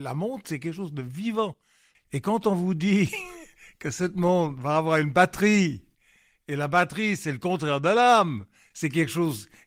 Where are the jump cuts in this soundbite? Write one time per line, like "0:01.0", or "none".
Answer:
0:01.9